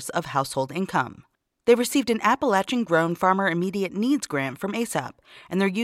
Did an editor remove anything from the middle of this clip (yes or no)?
no